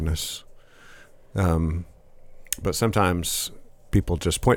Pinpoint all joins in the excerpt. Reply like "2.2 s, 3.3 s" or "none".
none